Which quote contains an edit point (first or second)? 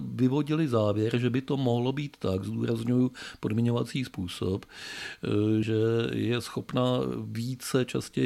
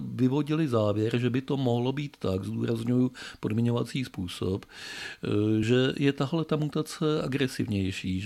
first